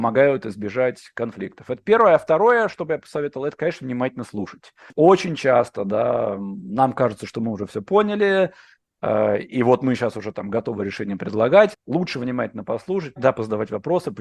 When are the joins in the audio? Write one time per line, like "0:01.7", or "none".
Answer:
0:11.7
0:13.2